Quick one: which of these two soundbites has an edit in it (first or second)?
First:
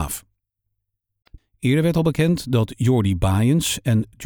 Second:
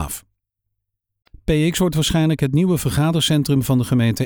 first